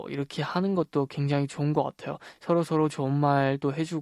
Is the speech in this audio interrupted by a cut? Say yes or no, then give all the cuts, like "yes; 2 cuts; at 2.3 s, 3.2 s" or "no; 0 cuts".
no; 0 cuts